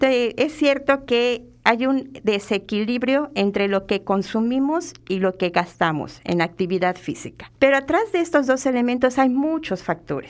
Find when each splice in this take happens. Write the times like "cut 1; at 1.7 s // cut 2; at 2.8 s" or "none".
cut 1; at 7.6 s